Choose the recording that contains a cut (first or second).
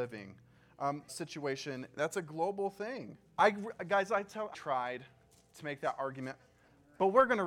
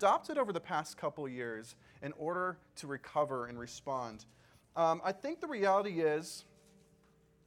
first